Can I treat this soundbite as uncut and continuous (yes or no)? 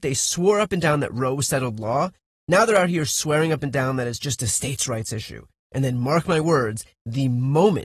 yes